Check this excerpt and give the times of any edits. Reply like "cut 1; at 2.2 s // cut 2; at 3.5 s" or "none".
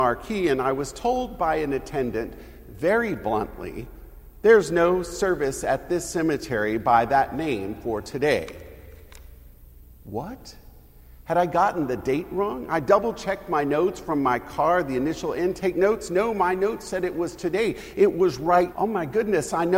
cut 1; at 18.7 s